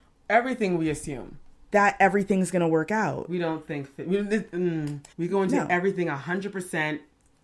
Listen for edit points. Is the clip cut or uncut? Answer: cut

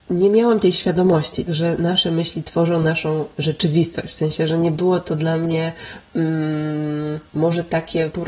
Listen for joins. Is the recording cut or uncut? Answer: cut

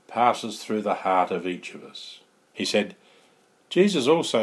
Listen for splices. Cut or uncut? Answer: cut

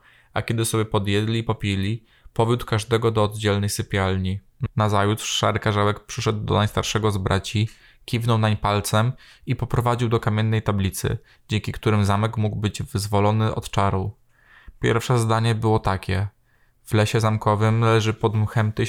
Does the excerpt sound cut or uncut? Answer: cut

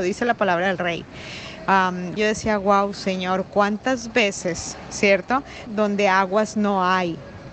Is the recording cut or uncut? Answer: cut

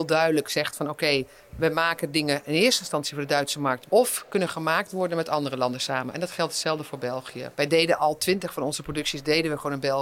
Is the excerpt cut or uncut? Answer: cut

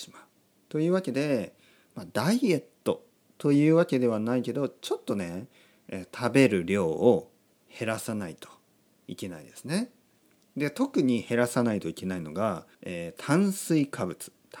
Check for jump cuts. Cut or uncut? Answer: cut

